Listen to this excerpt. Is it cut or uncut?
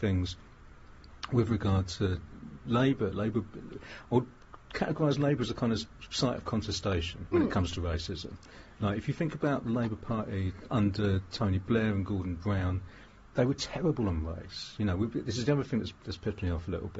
uncut